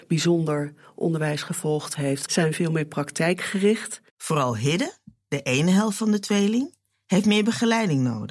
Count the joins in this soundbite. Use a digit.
2